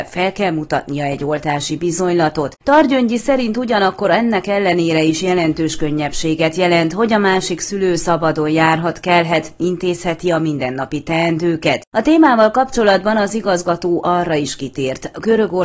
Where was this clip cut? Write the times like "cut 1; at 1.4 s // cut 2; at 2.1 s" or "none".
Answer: cut 1; at 2.5 s